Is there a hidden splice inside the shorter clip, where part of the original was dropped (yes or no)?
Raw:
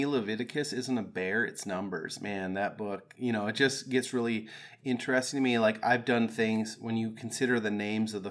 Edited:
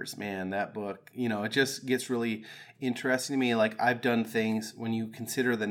no